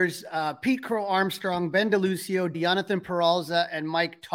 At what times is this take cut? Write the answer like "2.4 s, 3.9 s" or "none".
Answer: 2.5 s